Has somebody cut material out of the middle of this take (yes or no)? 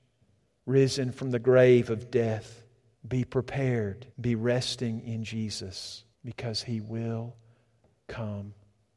yes